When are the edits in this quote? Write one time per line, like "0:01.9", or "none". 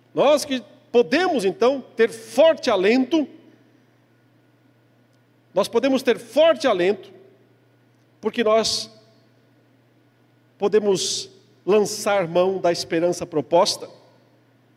none